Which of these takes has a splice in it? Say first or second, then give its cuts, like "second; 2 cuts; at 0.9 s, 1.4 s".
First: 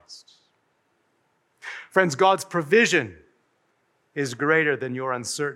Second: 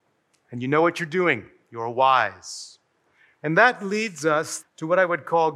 second; 2 cuts; at 3.4 s, 4.6 s